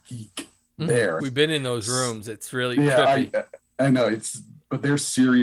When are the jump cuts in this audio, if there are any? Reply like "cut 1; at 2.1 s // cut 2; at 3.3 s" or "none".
cut 1; at 1.2 s // cut 2; at 3.8 s